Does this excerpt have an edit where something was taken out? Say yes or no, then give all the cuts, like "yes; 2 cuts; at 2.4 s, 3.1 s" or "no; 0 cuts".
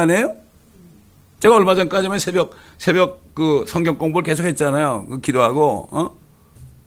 no; 0 cuts